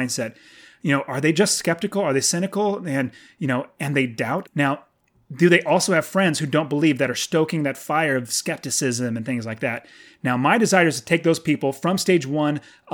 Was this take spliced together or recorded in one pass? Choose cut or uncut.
cut